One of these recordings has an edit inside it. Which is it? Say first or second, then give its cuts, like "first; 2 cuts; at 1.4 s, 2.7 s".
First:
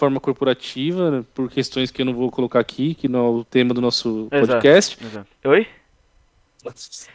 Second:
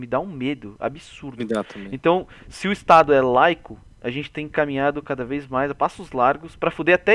first; 1 cut; at 5.4 s